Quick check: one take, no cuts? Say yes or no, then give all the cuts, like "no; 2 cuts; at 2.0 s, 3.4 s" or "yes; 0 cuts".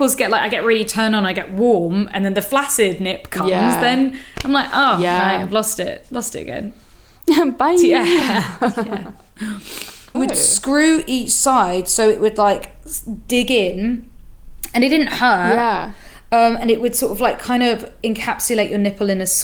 no; 1 cut; at 10.1 s